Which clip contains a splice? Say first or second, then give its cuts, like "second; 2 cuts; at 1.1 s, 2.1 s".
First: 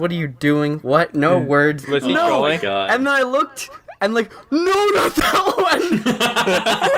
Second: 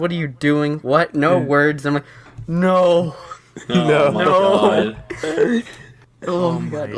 first; 1 cut; at 1.8 s